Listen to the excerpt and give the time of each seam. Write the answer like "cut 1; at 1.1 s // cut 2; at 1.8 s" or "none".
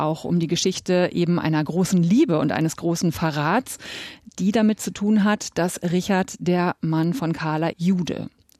cut 1; at 7.7 s